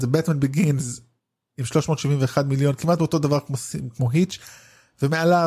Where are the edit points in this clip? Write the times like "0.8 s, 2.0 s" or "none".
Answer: none